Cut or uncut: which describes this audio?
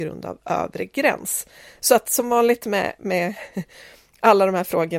uncut